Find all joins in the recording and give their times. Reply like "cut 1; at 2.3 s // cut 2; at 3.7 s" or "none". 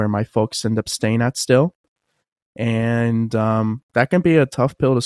none